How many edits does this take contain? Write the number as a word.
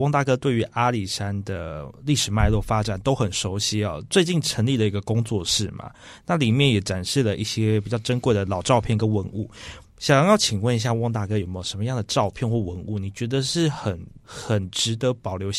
one